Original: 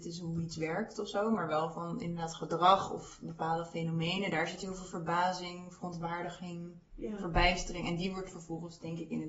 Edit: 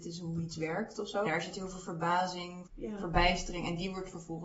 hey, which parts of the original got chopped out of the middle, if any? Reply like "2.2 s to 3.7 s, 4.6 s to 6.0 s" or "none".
1.2 s to 4.3 s, 5.7 s to 6.8 s